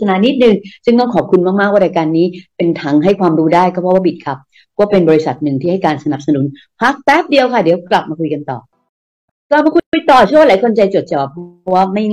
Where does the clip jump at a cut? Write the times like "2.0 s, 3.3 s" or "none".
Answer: 11.1 s